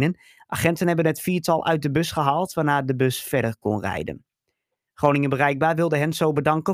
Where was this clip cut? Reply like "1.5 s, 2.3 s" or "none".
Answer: 4.9 s